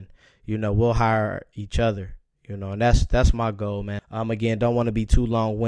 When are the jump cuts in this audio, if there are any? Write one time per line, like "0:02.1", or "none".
0:04.0

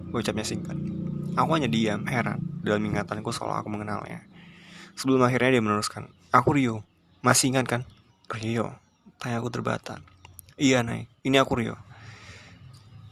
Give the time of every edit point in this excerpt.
0:08.1

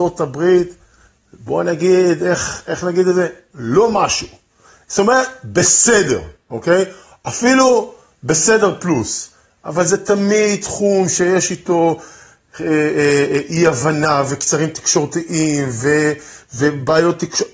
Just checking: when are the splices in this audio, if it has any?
none

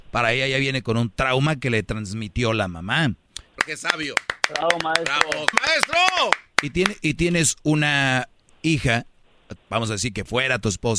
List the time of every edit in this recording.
0:03.6
0:05.5
0:09.6

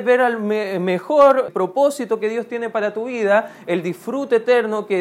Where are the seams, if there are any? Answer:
0:01.5

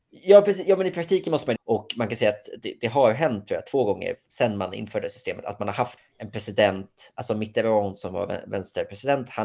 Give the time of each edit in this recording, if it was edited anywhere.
0:01.6
0:06.0

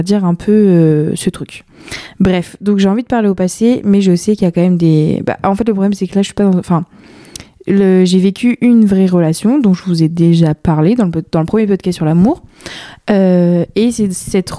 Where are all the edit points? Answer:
none

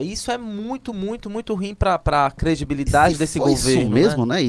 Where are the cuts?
none

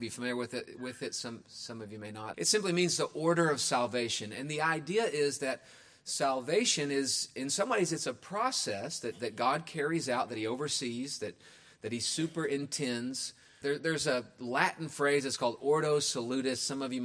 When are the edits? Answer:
0:02.3
0:13.6

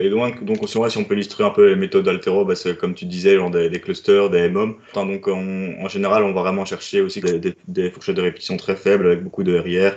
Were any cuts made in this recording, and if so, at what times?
0:04.9
0:07.2

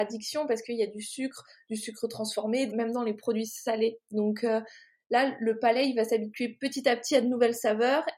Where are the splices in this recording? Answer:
0:02.7

